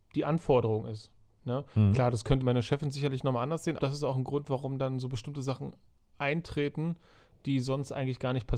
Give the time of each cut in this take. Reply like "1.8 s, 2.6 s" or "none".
2.4 s, 3.8 s